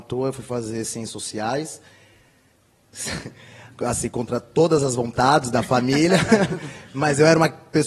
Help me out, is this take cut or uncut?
uncut